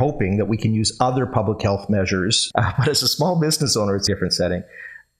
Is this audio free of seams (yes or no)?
no